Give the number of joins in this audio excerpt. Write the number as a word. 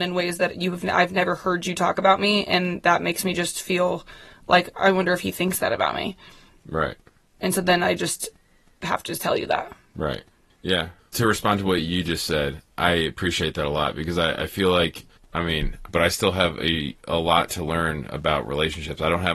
two